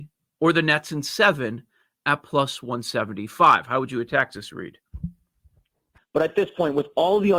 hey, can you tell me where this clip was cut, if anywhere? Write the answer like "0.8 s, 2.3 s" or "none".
6.0 s